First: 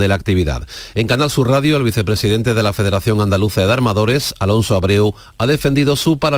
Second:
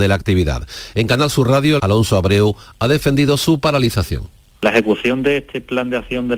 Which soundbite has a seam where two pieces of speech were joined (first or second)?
second